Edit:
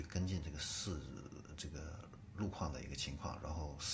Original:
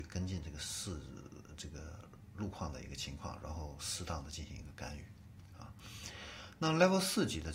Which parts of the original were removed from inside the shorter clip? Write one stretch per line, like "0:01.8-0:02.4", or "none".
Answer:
none

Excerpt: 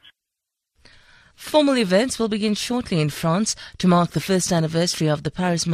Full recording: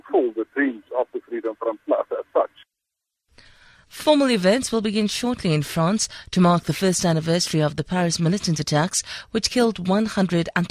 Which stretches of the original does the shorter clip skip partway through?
none

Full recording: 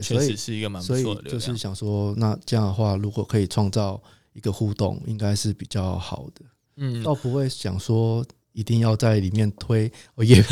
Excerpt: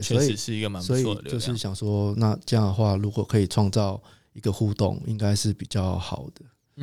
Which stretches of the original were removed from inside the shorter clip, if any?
none

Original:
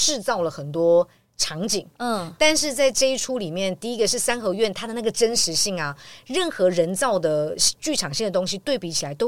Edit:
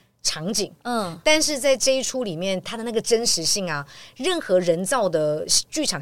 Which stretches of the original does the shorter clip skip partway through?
0:03.8-0:04.7

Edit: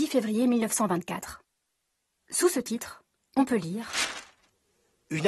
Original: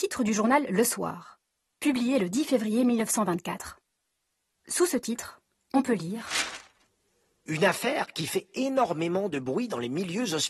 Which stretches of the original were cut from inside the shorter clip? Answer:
none

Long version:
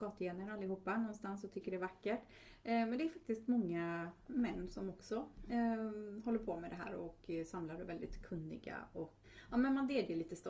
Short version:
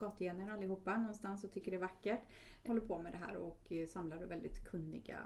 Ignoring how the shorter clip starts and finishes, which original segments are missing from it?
0:02.6-0:06.2

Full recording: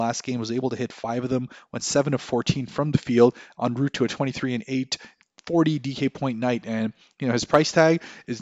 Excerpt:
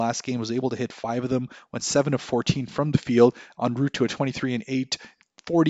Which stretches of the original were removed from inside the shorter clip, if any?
none

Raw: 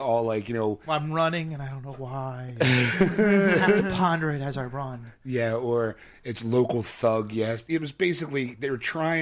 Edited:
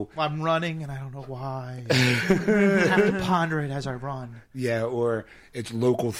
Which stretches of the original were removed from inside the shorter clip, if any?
none

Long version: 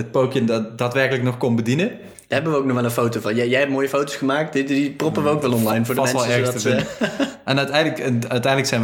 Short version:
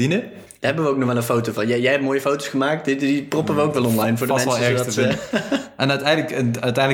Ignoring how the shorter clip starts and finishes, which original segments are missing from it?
none

